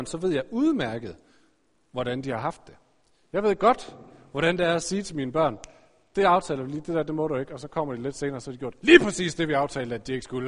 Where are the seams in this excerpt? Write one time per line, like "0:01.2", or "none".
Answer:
none